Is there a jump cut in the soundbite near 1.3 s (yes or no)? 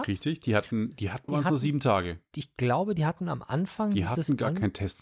yes